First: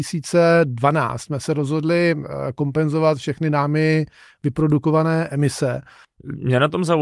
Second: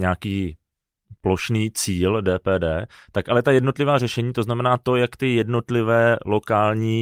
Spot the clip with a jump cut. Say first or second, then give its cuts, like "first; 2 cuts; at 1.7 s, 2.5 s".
first; 1 cut; at 6.0 s